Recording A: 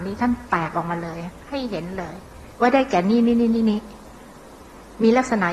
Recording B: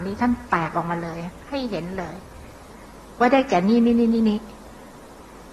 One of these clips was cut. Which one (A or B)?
A